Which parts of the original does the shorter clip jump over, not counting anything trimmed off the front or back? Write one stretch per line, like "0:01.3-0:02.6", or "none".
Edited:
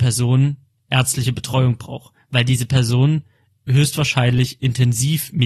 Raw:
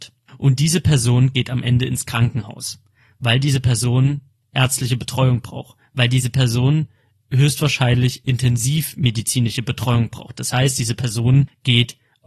none